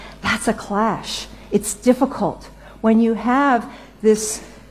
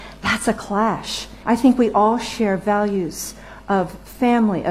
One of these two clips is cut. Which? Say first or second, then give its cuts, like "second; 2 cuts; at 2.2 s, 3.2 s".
second; 1 cut; at 1.4 s